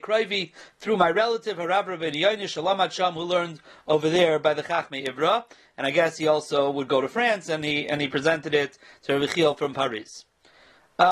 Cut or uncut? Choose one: uncut